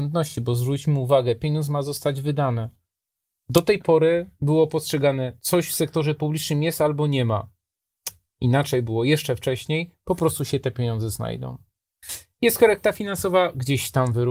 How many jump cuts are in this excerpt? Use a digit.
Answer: 0